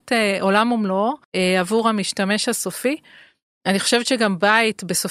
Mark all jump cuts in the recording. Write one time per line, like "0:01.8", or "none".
0:01.2